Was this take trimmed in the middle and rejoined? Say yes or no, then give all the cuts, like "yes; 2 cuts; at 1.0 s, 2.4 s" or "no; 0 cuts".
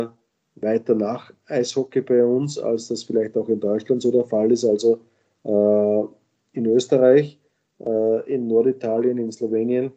no; 0 cuts